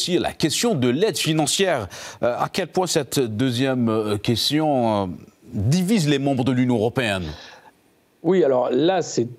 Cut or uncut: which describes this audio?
uncut